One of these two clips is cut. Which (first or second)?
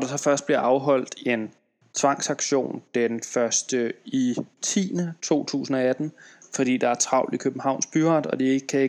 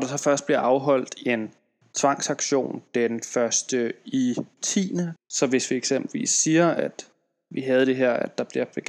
second